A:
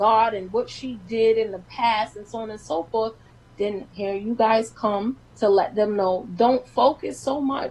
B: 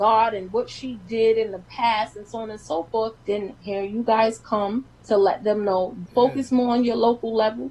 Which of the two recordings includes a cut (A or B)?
B